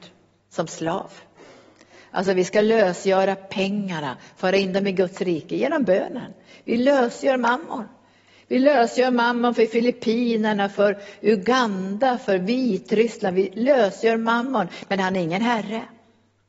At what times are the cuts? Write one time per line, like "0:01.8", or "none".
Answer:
none